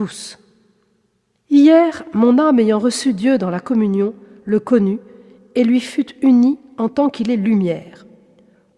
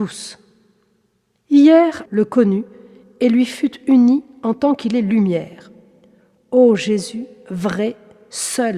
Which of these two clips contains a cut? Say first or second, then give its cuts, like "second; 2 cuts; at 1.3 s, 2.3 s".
second; 1 cut; at 2.1 s